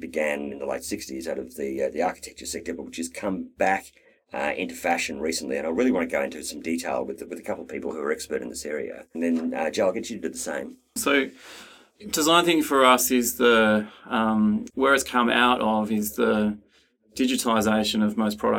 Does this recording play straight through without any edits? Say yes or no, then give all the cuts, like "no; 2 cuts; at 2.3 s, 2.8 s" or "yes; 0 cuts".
no; 3 cuts; at 9.1 s, 11.0 s, 14.7 s